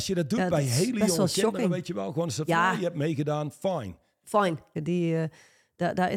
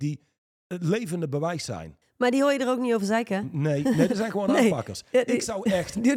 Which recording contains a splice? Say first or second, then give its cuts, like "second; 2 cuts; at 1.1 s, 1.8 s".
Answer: first; 1 cut; at 4.8 s